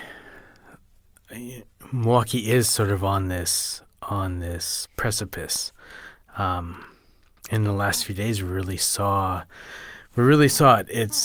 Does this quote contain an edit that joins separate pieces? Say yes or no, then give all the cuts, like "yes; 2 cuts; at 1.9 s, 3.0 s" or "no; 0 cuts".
no; 0 cuts